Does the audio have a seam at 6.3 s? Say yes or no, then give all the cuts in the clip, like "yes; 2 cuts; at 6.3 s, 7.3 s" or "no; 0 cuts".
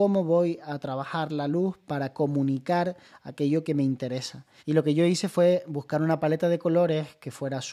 no; 1 cut; at 4.6 s